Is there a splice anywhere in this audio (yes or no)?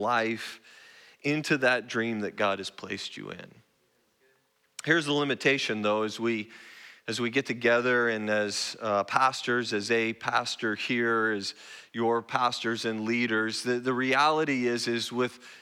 no